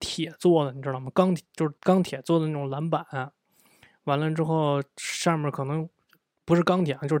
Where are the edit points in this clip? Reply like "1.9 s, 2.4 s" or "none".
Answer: 1.8 s